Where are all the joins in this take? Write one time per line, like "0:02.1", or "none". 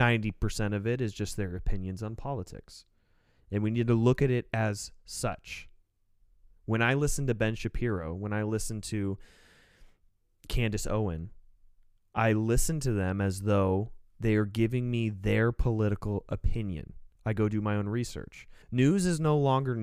0:17.2
0:18.6